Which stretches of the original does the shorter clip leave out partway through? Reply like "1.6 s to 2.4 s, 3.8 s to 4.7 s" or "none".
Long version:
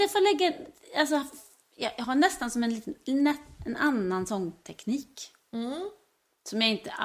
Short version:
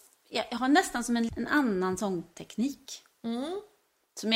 2.8 s to 3.6 s